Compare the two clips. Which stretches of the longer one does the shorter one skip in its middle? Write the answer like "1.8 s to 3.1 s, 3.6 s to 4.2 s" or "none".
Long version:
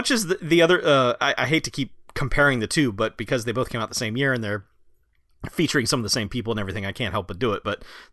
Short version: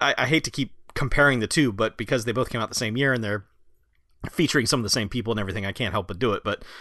none